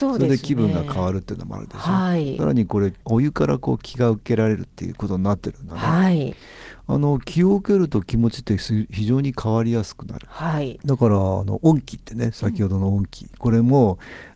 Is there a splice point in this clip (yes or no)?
no